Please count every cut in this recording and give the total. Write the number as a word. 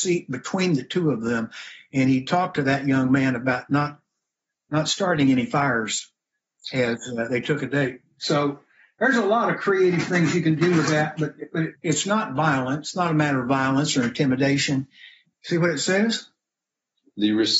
two